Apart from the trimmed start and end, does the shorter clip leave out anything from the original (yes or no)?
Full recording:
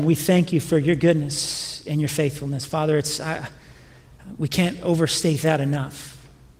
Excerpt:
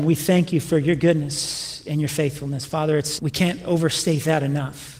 yes